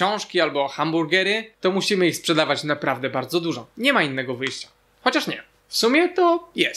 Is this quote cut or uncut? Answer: uncut